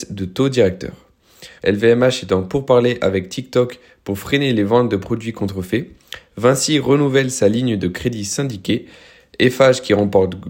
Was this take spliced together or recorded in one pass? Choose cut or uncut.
cut